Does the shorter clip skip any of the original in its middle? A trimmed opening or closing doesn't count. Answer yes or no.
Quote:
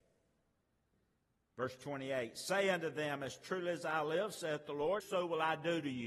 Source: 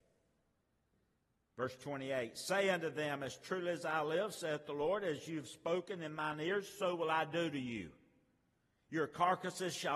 yes